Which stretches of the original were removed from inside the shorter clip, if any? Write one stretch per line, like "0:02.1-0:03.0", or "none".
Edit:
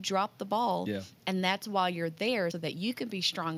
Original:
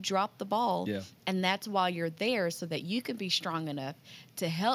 0:02.5-0:02.6

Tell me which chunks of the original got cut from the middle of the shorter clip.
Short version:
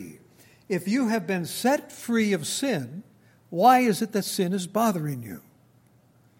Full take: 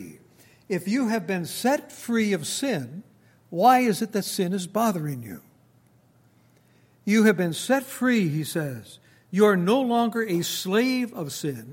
none

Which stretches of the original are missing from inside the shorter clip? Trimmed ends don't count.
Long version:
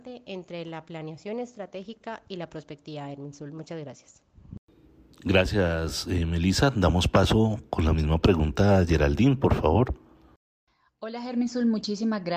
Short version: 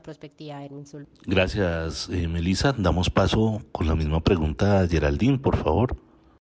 0:03.5-0:05.0

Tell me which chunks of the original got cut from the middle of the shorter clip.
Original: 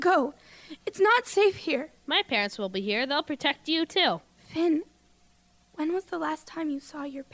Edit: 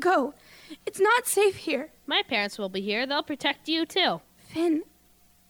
none

